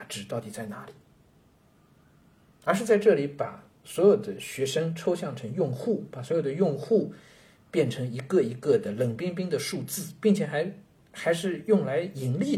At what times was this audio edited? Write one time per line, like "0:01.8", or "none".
none